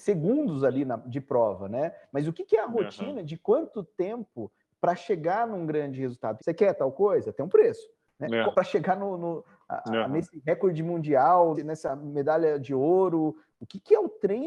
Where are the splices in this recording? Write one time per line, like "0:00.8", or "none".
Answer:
0:06.4
0:08.5
0:11.5